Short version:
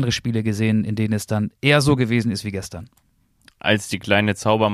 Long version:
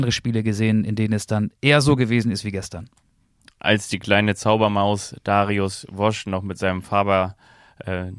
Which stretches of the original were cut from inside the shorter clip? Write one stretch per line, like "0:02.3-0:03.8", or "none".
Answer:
none